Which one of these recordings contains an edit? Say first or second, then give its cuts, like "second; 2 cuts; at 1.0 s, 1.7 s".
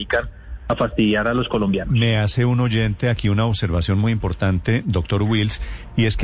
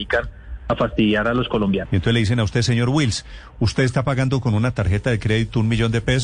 second; 1 cut; at 1.9 s